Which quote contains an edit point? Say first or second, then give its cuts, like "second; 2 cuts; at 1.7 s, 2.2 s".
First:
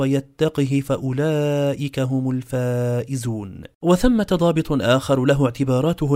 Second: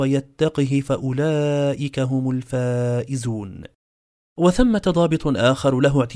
first; 1 cut; at 3.7 s